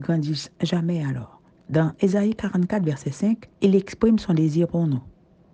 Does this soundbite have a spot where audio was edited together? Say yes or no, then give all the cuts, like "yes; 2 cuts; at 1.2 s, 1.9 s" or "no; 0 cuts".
yes; 2 cuts; at 1.5 s, 3.5 s